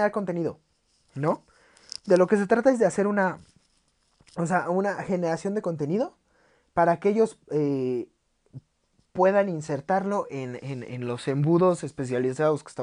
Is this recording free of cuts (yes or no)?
yes